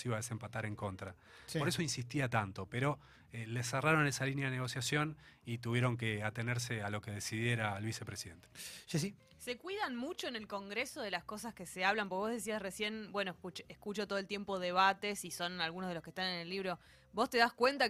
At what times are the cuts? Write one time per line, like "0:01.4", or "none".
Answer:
none